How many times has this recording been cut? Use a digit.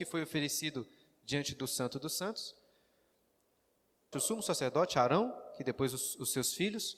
1